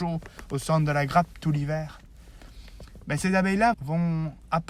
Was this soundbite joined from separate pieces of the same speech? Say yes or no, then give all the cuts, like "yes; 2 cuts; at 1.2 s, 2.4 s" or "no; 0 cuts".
yes; 1 cut; at 3.7 s